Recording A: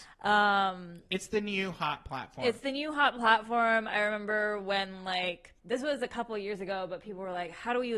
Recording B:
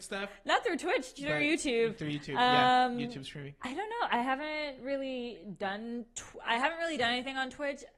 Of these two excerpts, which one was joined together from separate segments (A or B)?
A